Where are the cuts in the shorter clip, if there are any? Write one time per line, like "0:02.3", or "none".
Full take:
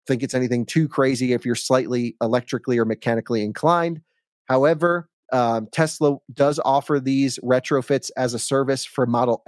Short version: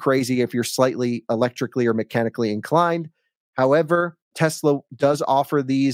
0:04.3